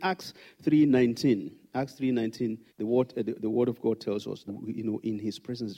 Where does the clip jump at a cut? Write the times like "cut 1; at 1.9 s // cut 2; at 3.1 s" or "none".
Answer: cut 1; at 2.7 s // cut 2; at 4.5 s